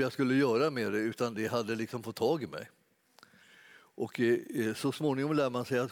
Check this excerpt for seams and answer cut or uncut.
uncut